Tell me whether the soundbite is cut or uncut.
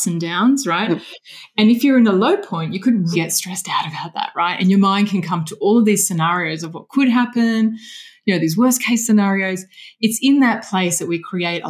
cut